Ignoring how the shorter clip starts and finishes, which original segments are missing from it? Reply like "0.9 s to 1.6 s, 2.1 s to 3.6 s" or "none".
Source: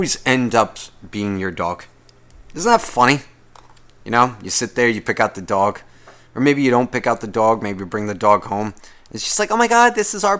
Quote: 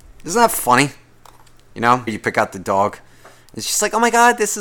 4.4 s to 4.9 s, 6.3 s to 9.0 s